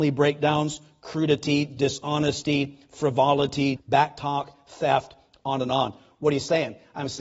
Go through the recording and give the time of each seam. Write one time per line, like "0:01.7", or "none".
0:03.8